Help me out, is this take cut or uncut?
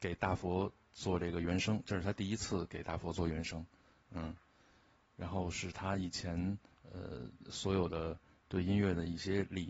uncut